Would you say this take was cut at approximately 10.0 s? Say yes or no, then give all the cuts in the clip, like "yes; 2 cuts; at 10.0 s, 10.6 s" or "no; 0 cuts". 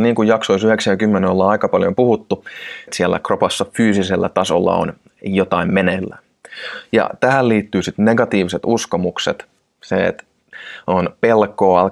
no; 1 cut; at 2.9 s